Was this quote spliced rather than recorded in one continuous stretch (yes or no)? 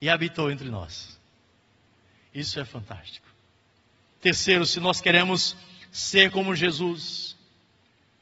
yes